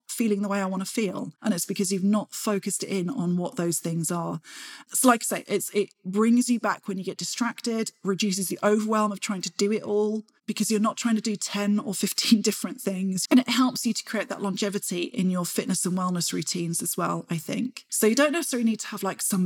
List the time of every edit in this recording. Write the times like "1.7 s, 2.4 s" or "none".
13.3 s, 17.9 s